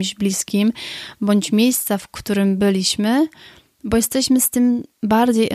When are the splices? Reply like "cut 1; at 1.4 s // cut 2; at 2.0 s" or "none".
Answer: none